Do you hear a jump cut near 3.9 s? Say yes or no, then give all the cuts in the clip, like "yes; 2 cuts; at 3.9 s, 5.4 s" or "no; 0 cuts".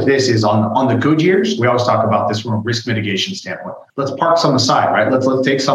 yes; 1 cut; at 3.9 s